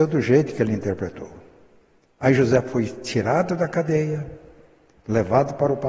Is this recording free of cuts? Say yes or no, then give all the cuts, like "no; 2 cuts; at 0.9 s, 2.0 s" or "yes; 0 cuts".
yes; 0 cuts